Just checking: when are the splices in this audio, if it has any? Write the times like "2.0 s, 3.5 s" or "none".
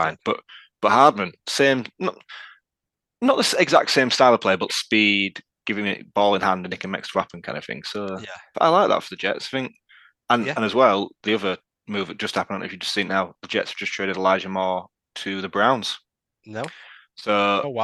4.7 s, 8.5 s